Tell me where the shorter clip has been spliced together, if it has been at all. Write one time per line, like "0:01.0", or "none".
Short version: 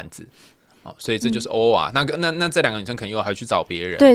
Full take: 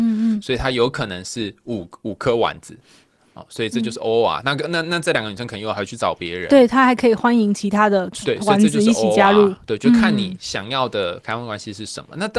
none